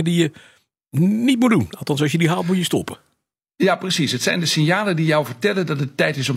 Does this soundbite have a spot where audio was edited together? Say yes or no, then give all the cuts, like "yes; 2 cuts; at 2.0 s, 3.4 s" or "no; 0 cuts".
no; 0 cuts